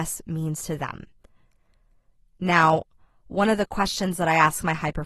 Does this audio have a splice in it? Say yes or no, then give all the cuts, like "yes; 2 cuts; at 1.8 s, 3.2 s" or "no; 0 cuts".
no; 0 cuts